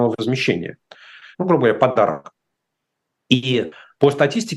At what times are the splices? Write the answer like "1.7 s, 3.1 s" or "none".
1.3 s